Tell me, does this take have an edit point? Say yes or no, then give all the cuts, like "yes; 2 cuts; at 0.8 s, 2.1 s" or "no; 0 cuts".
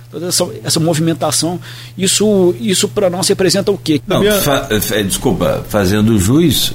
yes; 1 cut; at 4.0 s